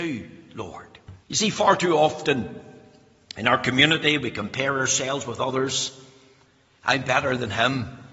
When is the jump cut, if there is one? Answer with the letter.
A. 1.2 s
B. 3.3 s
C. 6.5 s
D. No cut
A